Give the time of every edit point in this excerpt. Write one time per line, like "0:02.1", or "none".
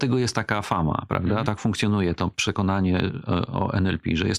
0:01.4